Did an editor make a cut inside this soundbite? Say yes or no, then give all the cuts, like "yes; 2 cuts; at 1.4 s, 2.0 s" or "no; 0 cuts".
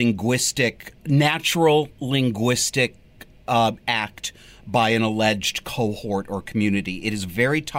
no; 0 cuts